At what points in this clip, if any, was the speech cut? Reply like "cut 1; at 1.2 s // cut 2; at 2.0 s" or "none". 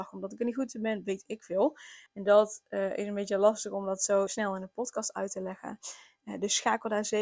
cut 1; at 2.1 s // cut 2; at 4.3 s